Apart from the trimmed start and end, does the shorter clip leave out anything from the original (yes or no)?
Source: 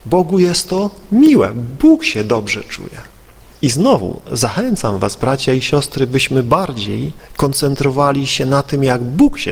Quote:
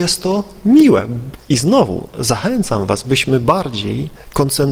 yes